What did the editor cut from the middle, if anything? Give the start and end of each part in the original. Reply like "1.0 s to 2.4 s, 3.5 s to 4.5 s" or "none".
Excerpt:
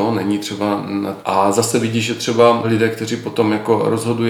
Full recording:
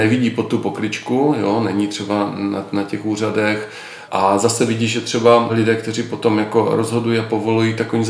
2.7 s to 4.1 s

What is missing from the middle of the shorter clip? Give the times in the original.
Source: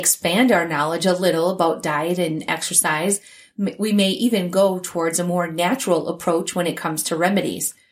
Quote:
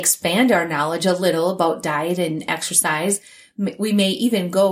none

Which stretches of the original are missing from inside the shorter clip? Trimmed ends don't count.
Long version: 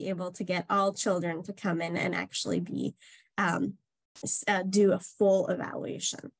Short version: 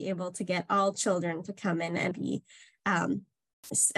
2.1 s to 2.6 s

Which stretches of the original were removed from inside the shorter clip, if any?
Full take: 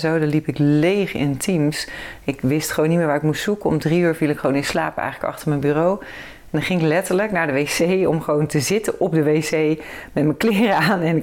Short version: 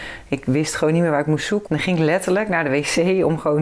3.6 s to 6.5 s

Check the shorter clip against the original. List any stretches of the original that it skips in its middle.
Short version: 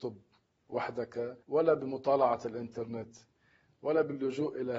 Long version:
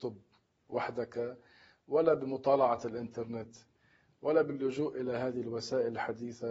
1.4 s to 1.8 s

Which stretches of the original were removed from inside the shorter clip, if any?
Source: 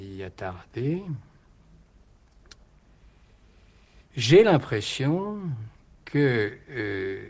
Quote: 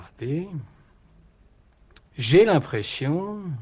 2.6 s to 4.0 s

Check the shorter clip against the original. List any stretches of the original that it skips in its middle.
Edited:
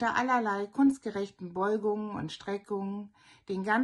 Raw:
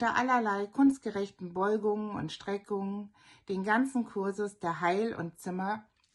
none

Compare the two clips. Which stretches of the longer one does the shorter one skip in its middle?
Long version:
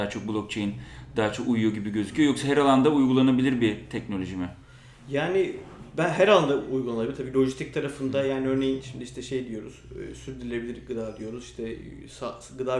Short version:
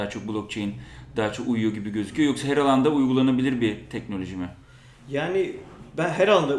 none

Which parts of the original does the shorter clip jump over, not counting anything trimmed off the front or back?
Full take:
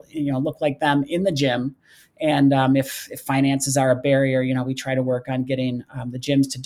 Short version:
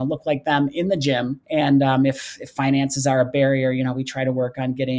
1.8 s to 2.1 s

